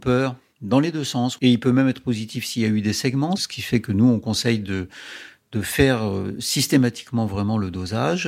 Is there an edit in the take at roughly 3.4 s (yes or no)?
yes